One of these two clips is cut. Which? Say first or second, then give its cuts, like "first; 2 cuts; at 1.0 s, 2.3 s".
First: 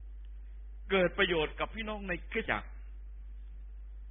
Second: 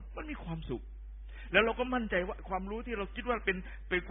first; 1 cut; at 2.5 s